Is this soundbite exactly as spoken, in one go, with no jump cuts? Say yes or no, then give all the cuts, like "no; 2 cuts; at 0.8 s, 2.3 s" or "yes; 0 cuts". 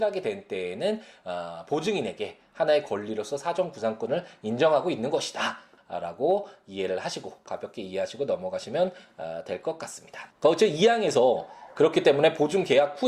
no; 2 cuts; at 5.8 s, 10.3 s